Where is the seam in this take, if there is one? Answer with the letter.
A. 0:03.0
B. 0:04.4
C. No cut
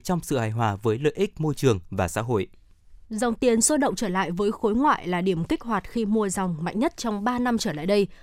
A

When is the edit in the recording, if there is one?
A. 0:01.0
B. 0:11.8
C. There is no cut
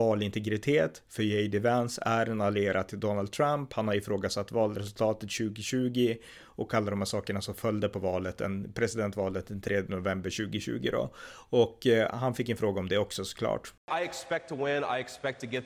C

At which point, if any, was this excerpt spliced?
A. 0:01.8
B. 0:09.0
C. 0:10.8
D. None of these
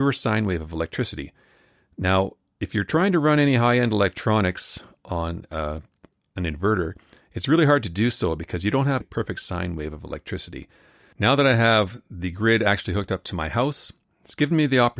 B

